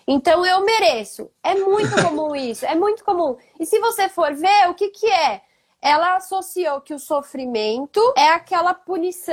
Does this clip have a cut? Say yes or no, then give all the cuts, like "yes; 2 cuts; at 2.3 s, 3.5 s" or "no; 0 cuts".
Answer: no; 0 cuts